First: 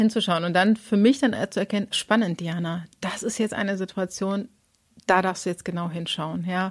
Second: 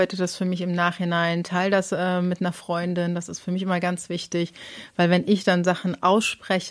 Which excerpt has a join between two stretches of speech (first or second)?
first